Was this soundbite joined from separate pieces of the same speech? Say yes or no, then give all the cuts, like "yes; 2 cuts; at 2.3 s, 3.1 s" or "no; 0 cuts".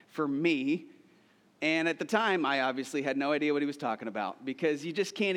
yes; 1 cut; at 1.5 s